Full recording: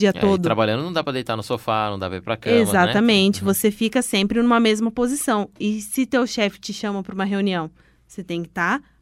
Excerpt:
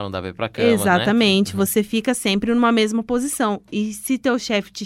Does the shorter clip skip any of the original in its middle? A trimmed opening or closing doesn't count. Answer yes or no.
no